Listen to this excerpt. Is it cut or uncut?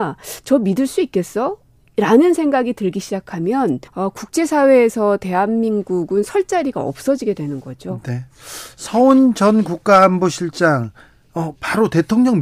cut